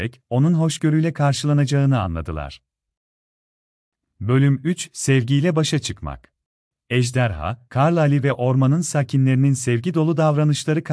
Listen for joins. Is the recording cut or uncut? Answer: uncut